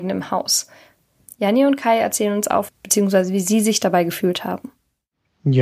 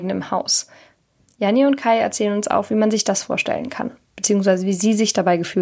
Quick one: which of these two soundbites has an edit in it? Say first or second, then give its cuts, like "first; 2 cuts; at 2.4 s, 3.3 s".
first; 1 cut; at 2.7 s